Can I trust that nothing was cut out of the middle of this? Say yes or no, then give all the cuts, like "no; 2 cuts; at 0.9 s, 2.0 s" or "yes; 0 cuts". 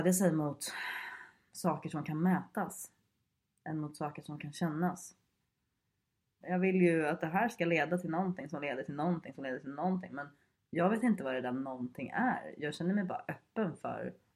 no; 1 cut; at 6.4 s